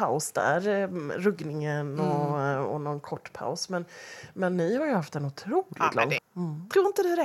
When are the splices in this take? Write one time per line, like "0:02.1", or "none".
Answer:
0:06.2